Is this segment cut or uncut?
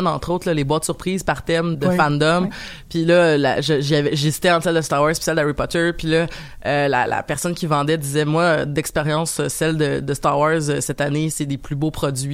cut